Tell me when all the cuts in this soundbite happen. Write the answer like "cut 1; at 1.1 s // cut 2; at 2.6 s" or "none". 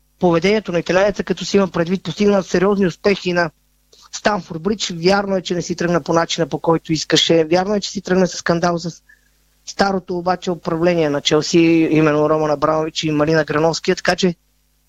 cut 1; at 2.0 s // cut 2; at 8.3 s